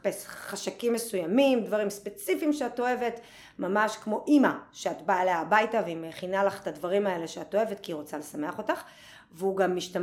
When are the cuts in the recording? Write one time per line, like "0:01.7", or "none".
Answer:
none